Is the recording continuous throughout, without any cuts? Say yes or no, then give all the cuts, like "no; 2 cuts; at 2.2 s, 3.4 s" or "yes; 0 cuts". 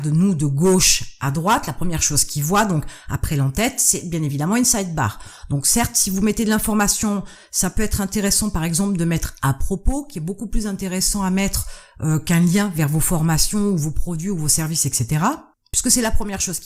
yes; 0 cuts